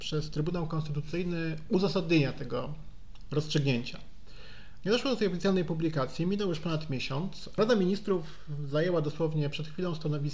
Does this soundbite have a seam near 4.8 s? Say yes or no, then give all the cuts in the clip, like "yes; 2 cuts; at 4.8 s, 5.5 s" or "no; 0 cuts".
yes; 1 cut; at 4.8 s